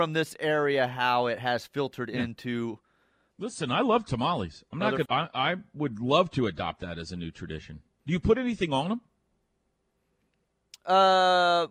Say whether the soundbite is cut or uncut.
cut